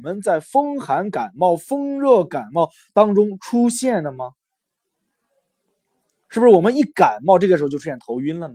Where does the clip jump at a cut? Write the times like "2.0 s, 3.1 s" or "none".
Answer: none